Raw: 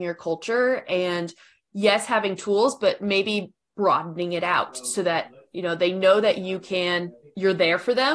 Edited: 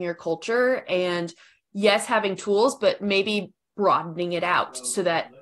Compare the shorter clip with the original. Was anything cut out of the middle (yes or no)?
no